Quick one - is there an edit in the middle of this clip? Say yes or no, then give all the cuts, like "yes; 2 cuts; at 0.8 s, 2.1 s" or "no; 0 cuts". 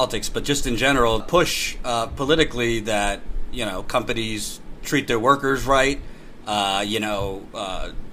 yes; 1 cut; at 1.2 s